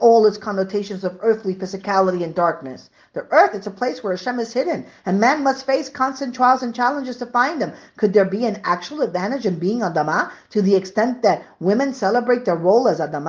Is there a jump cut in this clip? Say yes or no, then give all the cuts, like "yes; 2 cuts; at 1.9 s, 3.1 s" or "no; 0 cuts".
no; 0 cuts